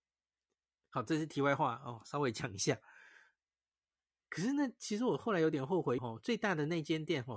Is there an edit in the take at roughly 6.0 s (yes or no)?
yes